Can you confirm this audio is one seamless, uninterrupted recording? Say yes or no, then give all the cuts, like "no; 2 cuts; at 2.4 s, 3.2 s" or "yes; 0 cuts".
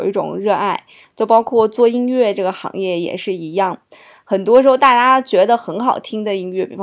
yes; 0 cuts